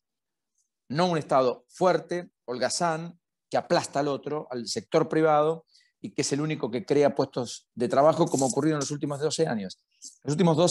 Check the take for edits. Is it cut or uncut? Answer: uncut